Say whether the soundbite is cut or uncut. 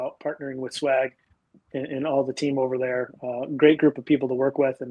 uncut